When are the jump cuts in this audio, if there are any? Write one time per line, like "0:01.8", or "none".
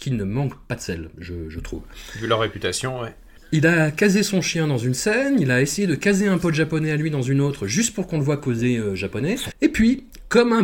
0:09.5